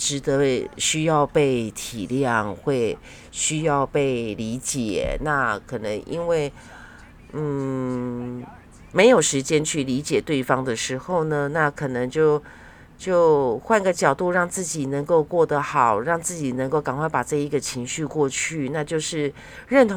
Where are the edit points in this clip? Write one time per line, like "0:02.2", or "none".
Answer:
none